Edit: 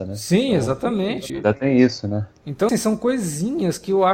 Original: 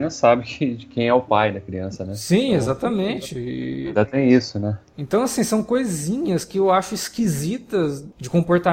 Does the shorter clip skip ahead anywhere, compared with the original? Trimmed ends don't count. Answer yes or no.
yes